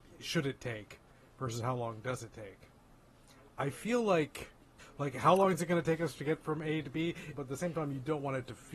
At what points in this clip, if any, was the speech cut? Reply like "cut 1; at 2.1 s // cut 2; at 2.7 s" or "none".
cut 1; at 4.8 s // cut 2; at 7.3 s